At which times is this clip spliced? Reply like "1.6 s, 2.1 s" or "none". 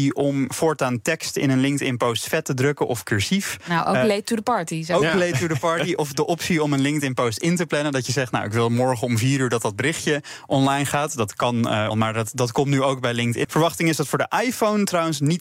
11.9 s, 13.4 s